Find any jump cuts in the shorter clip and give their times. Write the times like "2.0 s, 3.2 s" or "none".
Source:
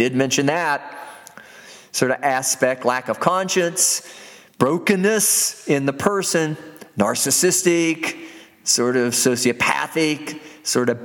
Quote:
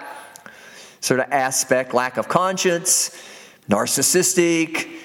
3.6 s